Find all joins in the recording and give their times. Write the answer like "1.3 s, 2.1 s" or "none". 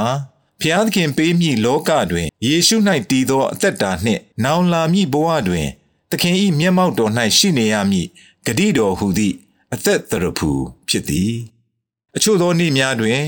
2.3 s, 4.3 s